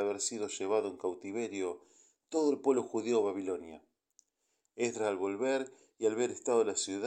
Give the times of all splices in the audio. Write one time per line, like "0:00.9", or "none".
none